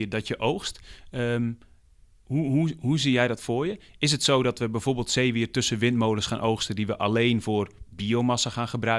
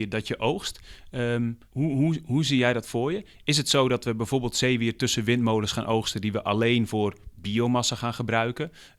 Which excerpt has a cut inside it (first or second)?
second